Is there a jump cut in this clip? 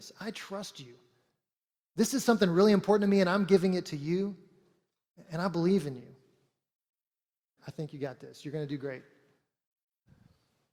yes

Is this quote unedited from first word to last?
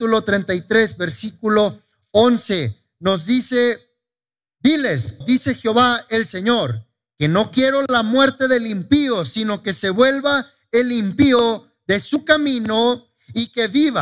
no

